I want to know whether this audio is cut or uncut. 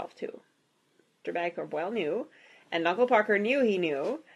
cut